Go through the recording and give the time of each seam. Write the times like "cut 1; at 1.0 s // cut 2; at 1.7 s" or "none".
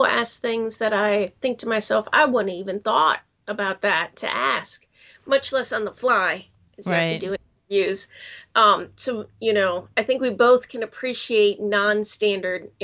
none